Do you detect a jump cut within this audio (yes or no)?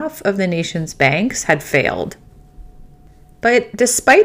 yes